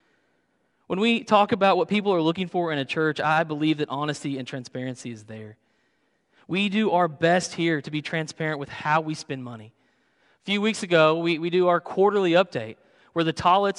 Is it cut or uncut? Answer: uncut